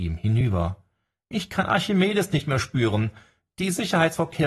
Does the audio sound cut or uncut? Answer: uncut